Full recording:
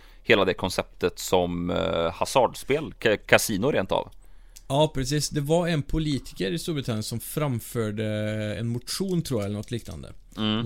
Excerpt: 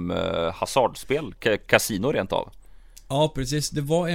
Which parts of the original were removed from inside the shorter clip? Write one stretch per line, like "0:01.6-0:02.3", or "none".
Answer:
none